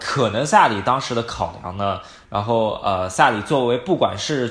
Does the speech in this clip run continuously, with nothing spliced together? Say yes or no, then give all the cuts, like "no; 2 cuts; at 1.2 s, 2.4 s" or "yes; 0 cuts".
no; 1 cut; at 2.2 s